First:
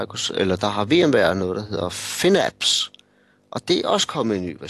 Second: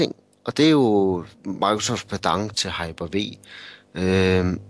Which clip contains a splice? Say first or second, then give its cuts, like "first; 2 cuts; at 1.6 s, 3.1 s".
second; 2 cuts; at 1.3 s, 2.5 s